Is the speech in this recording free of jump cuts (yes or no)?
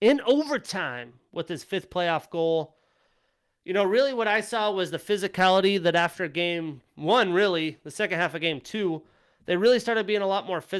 yes